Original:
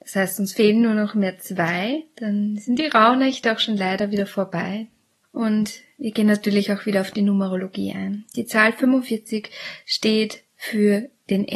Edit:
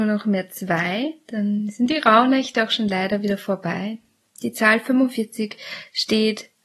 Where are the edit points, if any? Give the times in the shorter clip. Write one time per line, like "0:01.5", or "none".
0:04.4